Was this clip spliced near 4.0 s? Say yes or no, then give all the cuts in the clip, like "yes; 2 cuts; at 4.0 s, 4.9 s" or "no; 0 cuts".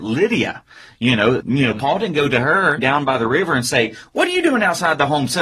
no; 2 cuts; at 1.4 s, 2.8 s